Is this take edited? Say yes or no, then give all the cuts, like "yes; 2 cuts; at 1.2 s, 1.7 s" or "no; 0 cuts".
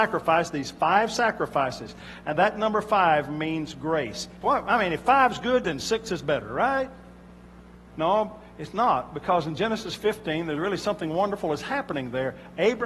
yes; 2 cuts; at 4.4 s, 7.9 s